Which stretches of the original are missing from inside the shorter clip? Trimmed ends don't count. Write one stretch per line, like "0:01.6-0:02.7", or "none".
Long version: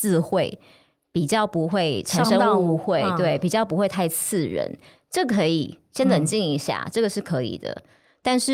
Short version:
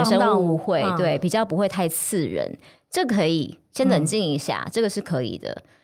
none